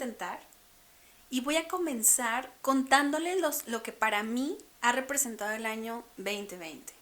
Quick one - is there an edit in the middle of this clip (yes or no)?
yes